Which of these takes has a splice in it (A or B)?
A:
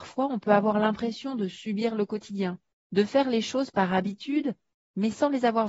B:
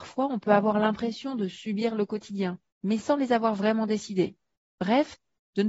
B